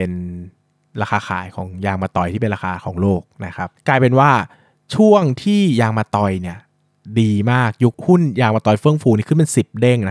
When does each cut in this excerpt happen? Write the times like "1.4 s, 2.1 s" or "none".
none